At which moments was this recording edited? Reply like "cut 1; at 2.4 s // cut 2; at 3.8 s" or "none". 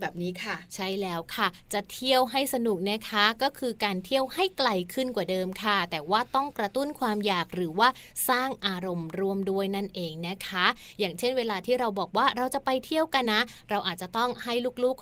cut 1; at 13.2 s